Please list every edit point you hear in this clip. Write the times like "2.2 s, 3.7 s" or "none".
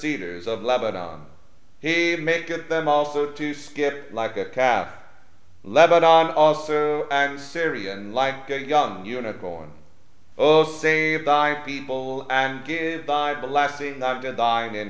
10.3 s